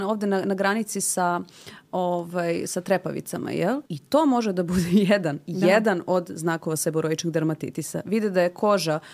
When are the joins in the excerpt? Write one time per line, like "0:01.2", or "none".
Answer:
0:03.9